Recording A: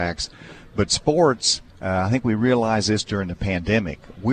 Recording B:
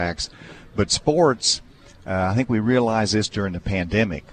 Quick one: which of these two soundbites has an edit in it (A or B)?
A